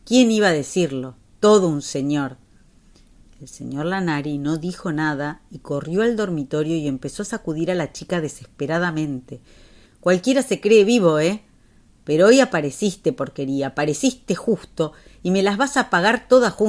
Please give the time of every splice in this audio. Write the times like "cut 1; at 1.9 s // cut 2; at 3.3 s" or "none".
cut 1; at 9.8 s